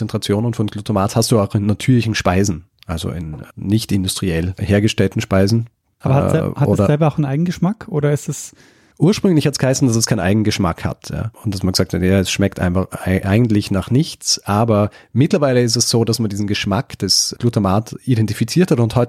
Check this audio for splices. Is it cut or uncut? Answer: uncut